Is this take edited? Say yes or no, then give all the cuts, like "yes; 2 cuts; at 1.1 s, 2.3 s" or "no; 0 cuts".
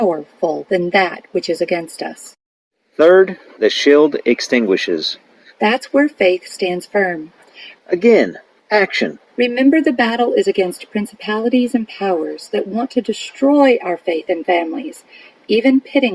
yes; 3 cuts; at 5.5 s, 7.7 s, 9.3 s